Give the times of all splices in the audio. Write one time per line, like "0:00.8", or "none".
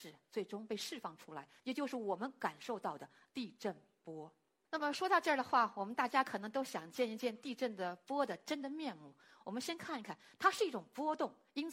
none